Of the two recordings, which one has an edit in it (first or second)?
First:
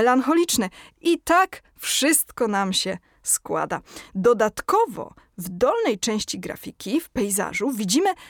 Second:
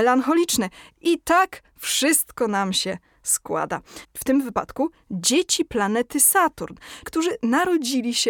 second